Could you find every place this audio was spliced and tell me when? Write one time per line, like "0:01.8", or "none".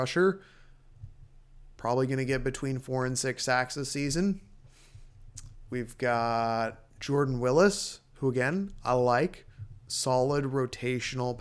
none